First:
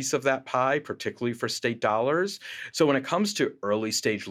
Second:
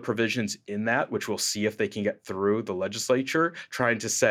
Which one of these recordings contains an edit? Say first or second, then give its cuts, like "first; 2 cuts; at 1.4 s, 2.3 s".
first; 1 cut; at 2.7 s